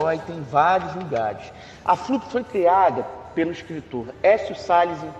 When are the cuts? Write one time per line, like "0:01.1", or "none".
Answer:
0:01.8